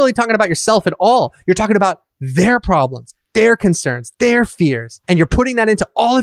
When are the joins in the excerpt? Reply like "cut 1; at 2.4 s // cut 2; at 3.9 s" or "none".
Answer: cut 1; at 5.0 s